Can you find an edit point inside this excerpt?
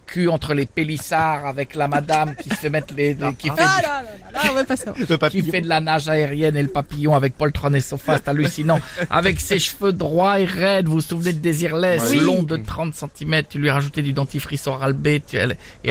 no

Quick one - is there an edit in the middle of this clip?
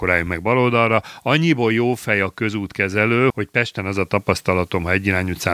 yes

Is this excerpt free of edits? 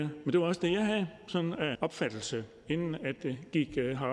no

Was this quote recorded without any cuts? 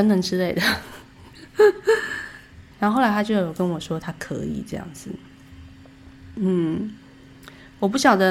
no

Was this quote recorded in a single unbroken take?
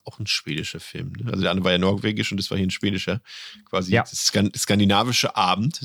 yes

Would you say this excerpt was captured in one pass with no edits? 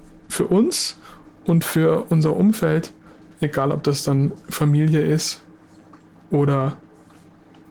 yes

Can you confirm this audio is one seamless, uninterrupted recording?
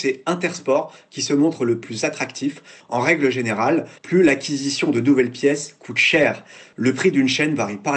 no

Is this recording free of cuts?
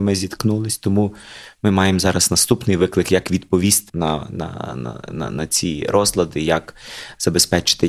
no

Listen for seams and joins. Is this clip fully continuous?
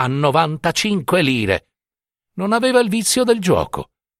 yes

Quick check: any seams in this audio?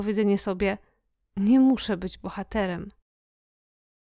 no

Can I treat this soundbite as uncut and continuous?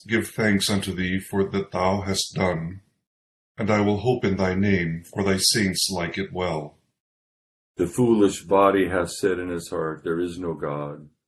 yes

